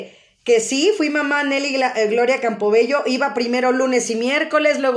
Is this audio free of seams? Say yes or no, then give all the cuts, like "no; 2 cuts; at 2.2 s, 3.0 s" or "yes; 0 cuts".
yes; 0 cuts